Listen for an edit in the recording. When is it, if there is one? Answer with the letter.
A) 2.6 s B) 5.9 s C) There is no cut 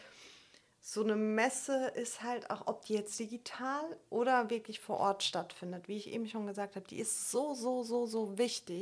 C